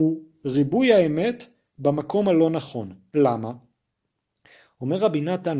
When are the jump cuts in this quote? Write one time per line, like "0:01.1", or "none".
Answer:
none